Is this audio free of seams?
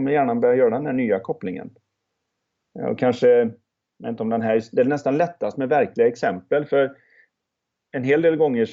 yes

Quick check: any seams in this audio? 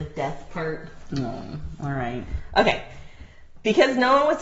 no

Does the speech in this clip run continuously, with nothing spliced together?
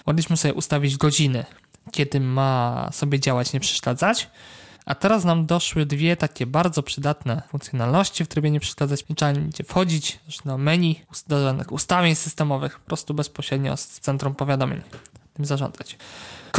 no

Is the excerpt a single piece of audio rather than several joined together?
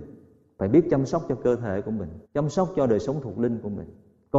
no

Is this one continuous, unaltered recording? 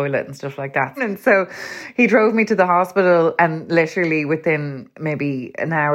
no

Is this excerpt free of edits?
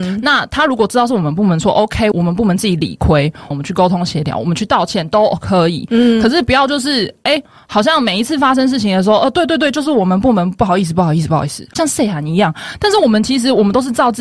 no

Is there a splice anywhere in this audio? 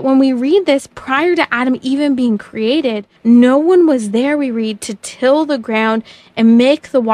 yes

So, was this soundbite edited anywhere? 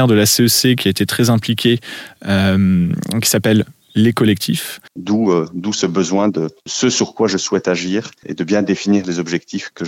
yes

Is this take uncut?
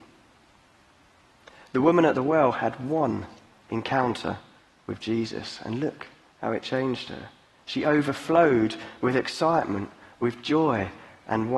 yes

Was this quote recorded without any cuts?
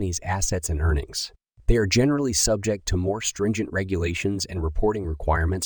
yes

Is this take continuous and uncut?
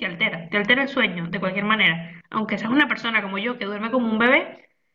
yes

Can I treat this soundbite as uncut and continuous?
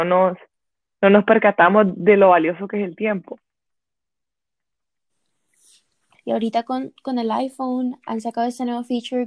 no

